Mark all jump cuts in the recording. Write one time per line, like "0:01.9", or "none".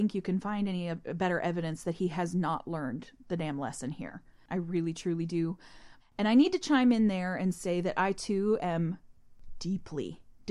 0:04.5
0:06.0